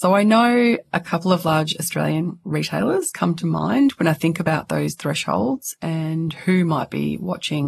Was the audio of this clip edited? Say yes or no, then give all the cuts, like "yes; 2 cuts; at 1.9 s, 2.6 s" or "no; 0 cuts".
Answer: no; 0 cuts